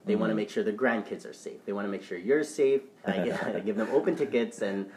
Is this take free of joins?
no; 1 cut; at 3.0 s

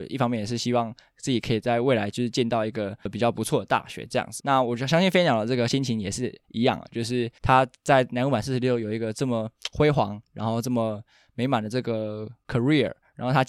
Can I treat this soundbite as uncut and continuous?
yes; 0 cuts

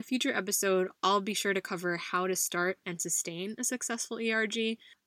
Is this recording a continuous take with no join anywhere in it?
no; 1 cut; at 2.8 s

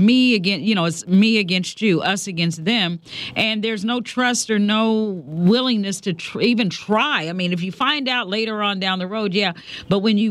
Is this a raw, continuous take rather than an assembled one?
yes; 0 cuts

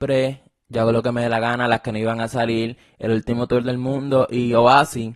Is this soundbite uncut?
yes; 0 cuts

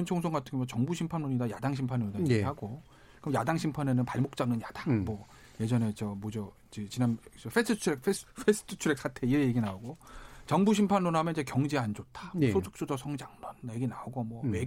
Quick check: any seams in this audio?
no; 0 cuts

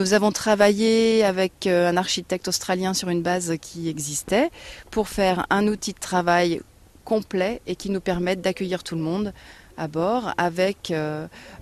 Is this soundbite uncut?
yes; 0 cuts

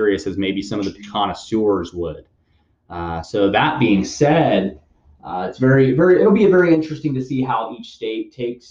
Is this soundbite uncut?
yes; 0 cuts

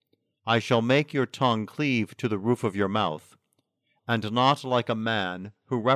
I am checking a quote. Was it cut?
yes; 1 cut; at 4.0 s

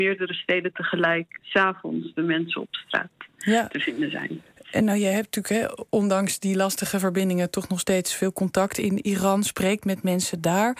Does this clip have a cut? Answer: no; 0 cuts

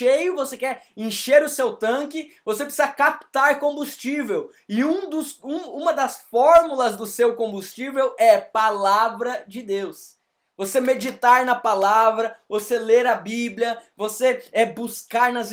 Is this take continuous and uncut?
yes; 0 cuts

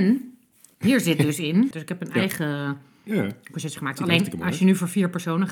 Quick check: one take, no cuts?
no; 1 cut; at 1.7 s

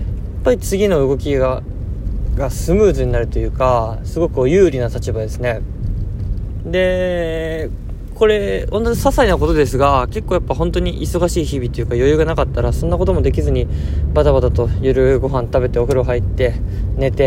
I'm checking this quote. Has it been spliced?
yes; 1 cut; at 6.6 s

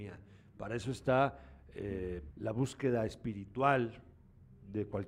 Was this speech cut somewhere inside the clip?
yes; 1 cut; at 2.3 s

